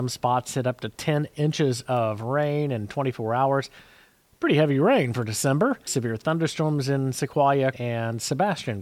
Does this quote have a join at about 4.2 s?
no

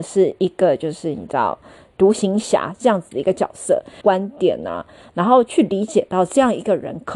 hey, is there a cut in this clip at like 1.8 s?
no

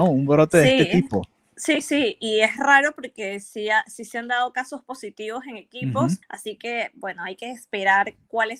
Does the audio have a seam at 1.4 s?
no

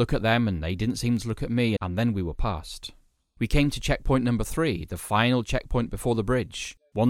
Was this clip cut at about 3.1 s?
no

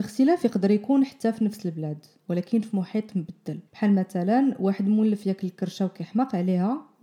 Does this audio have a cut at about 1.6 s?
no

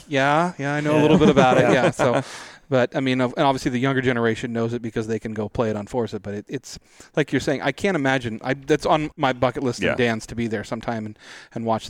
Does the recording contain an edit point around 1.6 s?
no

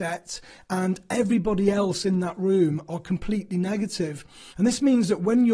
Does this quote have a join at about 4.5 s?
yes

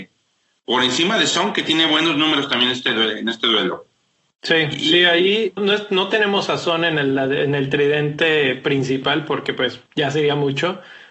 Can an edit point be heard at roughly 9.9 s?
yes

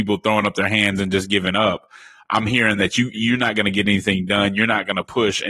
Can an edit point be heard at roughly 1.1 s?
no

